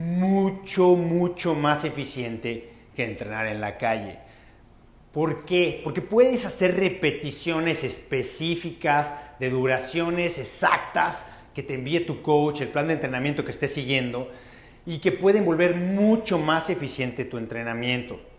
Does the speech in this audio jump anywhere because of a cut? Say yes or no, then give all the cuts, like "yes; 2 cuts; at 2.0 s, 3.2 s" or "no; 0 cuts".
no; 0 cuts